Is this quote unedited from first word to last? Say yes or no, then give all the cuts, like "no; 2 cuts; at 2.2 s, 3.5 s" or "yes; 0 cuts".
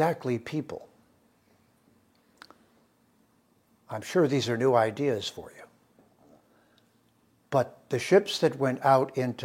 yes; 0 cuts